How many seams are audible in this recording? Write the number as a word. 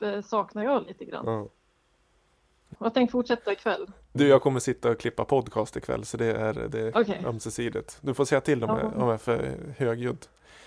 two